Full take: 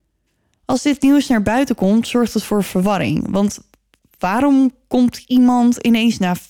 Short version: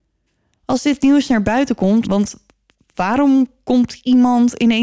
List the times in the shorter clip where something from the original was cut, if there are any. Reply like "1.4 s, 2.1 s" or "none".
2.0 s